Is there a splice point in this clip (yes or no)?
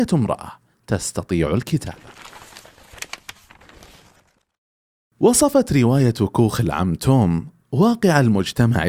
no